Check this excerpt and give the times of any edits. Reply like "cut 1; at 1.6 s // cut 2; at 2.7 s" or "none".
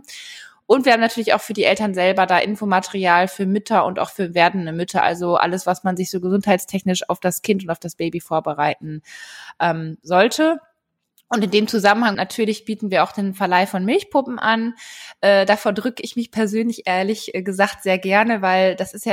cut 1; at 12.1 s

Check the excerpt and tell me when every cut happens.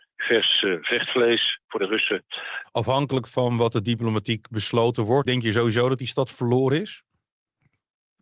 cut 1; at 2.6 s // cut 2; at 5.2 s

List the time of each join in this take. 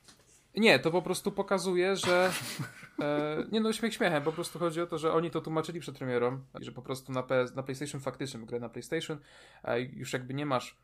cut 1; at 6.6 s

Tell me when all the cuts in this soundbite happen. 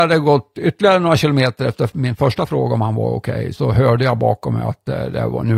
cut 1; at 3.5 s

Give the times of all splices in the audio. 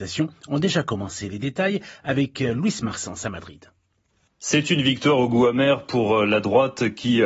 none

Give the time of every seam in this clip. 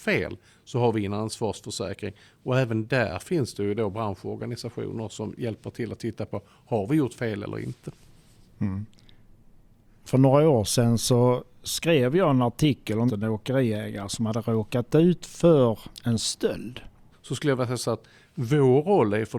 cut 1; at 13.1 s // cut 2; at 17.1 s

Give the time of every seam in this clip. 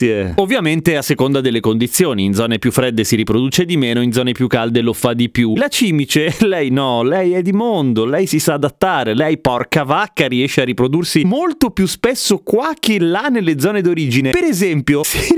cut 1; at 5.5 s

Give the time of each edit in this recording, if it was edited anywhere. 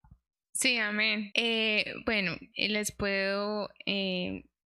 cut 1; at 1.3 s // cut 2; at 2.5 s

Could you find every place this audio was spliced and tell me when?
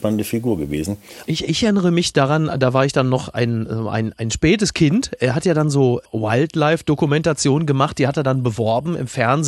cut 1; at 1.2 s

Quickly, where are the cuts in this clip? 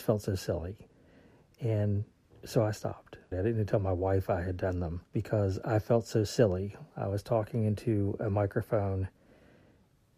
cut 1; at 3.3 s // cut 2; at 5.1 s

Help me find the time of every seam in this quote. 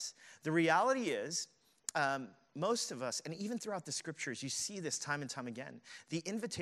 none

